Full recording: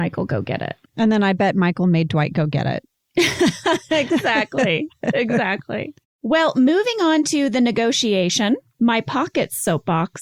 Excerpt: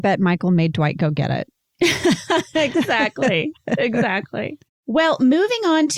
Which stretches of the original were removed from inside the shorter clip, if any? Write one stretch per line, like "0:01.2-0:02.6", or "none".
none